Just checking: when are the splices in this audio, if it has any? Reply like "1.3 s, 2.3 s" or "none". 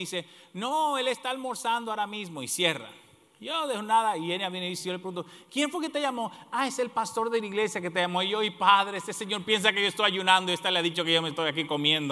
none